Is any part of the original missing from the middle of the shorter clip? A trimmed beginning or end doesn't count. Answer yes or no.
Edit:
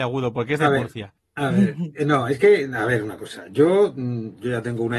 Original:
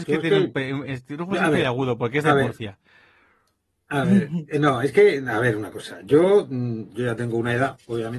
yes